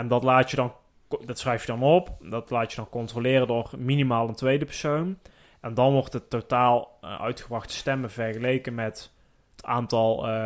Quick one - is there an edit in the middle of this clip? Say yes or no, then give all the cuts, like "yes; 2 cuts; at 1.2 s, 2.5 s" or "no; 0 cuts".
no; 0 cuts